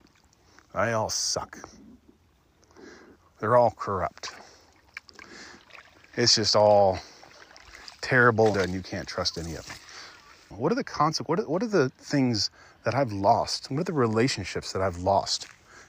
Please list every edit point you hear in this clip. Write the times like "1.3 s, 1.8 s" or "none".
8.5 s, 10.5 s